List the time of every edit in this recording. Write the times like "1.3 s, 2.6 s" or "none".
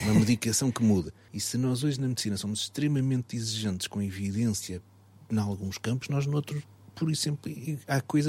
1.3 s